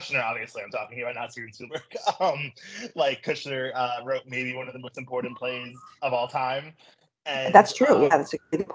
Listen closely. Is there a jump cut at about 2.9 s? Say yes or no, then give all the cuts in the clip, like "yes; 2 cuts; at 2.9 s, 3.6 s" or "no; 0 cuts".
no; 0 cuts